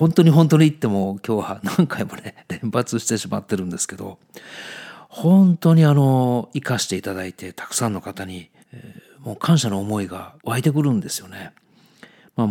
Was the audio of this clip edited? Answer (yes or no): yes